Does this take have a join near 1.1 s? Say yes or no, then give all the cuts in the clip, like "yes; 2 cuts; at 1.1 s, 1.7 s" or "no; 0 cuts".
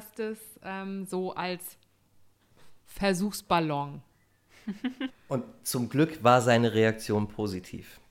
no; 1 cut; at 5.1 s